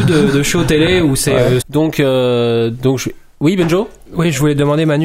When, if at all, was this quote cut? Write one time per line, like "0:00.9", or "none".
0:01.6